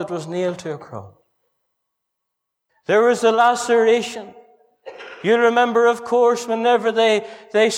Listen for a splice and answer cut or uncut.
cut